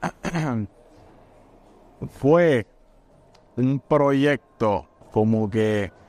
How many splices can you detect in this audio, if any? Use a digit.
1